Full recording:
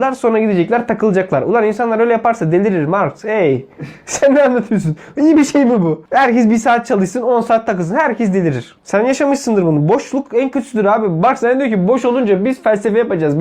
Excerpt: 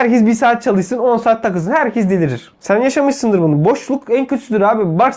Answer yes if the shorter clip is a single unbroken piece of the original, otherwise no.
yes